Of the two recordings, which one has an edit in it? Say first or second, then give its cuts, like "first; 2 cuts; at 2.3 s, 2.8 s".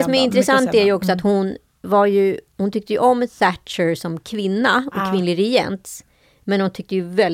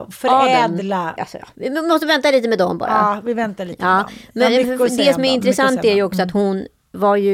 second; 1 cut; at 1.2 s